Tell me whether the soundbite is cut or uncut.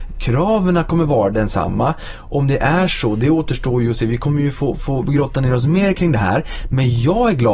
uncut